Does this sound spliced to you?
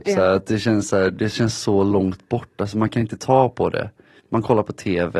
yes; 1 cut; at 4.2 s

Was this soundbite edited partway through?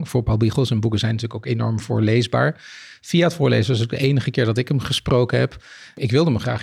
no; 0 cuts

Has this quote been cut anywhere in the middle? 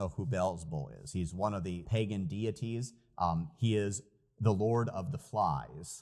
yes; 1 cut; at 1.8 s

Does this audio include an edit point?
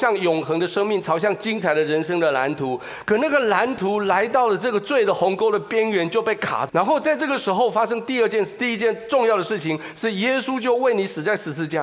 yes; 1 cut; at 6.7 s

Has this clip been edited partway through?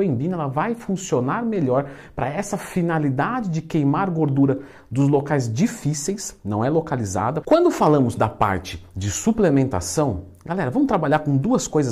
yes; 1 cut; at 7.4 s

